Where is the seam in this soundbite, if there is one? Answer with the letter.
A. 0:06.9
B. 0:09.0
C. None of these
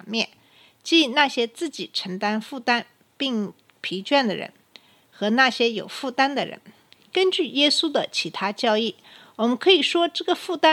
C